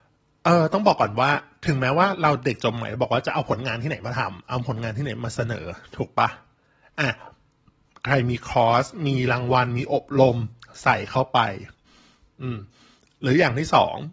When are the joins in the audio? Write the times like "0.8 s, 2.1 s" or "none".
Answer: none